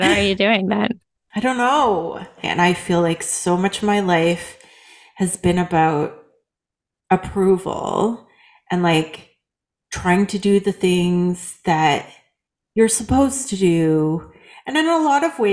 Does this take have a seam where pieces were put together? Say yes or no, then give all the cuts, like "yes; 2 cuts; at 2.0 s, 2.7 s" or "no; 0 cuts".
yes; 1 cut; at 2.4 s